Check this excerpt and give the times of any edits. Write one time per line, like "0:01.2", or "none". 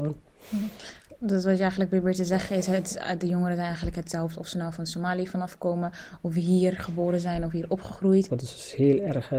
0:08.3